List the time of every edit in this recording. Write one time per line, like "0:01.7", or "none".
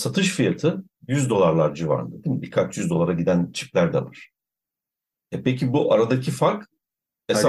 none